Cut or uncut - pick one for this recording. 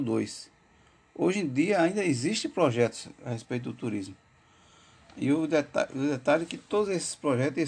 uncut